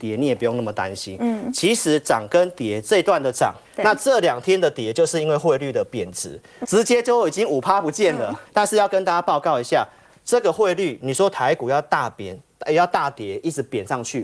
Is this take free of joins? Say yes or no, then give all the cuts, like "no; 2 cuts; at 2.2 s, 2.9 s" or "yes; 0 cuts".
no; 3 cuts; at 3.6 s, 6.6 s, 8.4 s